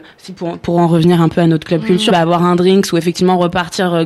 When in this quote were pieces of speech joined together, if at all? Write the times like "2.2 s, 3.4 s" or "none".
2.1 s